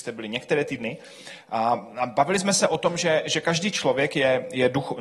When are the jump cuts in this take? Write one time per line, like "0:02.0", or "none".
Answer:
none